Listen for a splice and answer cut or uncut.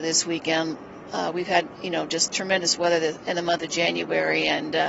uncut